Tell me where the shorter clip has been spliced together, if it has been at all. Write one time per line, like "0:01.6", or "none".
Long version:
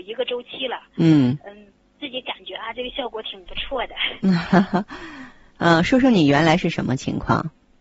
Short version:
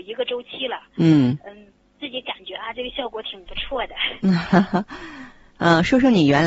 none